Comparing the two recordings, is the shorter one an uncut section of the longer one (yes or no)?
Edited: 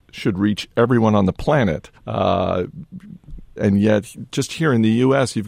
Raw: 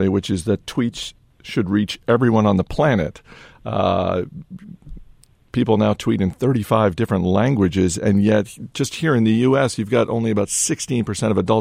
no